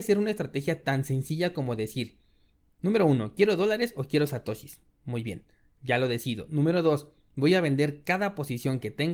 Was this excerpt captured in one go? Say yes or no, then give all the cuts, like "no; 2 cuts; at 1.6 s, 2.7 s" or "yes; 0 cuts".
yes; 0 cuts